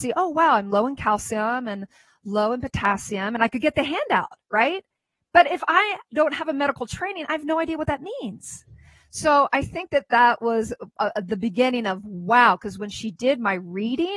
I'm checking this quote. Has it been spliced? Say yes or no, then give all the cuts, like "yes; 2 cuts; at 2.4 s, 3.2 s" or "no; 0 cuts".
no; 0 cuts